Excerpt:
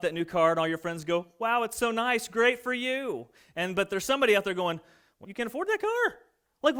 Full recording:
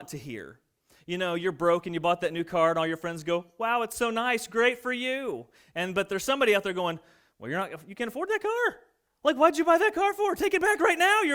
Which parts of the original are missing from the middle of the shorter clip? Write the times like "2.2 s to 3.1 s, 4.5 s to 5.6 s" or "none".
7.4 s to 7.8 s